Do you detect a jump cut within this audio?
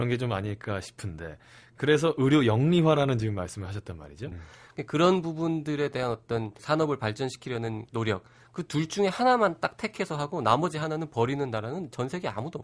yes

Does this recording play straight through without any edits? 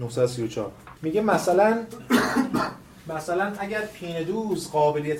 no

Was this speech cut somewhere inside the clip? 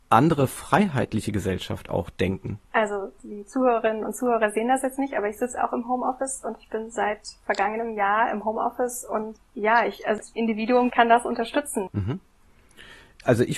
yes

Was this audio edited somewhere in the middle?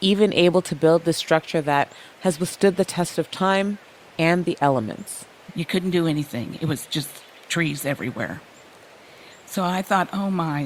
yes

